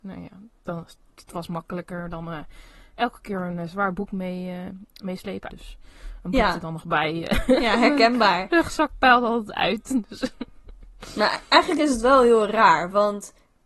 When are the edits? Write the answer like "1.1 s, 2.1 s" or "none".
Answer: 5.5 s